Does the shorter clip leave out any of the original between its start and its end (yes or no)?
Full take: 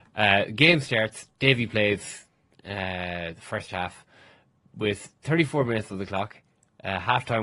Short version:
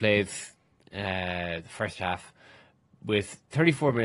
no